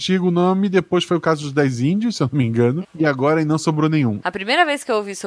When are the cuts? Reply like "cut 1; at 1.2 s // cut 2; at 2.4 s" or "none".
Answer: cut 1; at 2.8 s // cut 2; at 4.2 s